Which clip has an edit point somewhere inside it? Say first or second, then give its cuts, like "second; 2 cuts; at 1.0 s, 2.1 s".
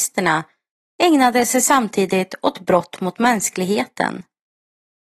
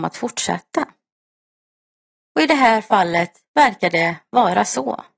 second; 1 cut; at 2.2 s